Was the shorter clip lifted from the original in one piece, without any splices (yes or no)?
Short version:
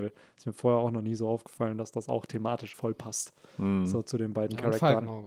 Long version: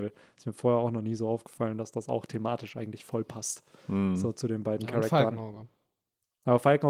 no